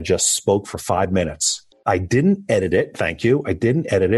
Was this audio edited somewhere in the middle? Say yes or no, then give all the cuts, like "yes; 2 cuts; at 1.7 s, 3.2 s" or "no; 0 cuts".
yes; 1 cut; at 1.7 s